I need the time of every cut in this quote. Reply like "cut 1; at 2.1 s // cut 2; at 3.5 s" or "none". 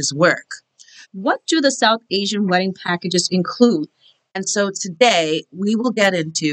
cut 1; at 1.0 s // cut 2; at 4.3 s

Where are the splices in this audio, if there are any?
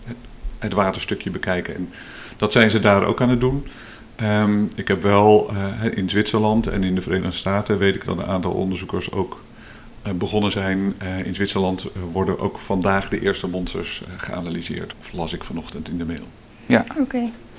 cut 1; at 14.9 s

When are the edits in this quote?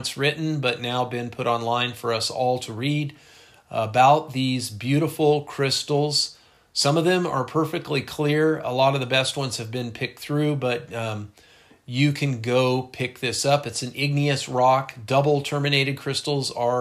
none

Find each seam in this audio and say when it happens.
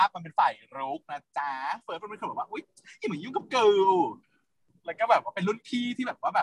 none

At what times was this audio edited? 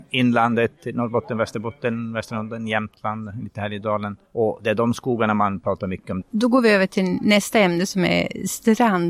cut 1; at 4.3 s // cut 2; at 6.2 s

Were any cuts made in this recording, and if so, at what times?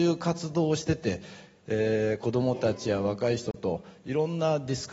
none

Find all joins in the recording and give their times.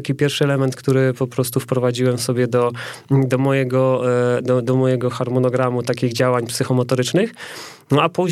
none

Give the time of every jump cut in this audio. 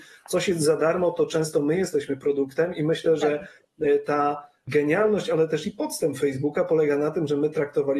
none

